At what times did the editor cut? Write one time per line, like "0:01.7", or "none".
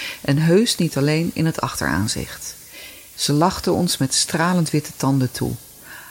0:03.1